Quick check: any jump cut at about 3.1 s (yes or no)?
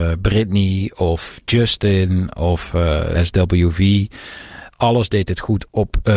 yes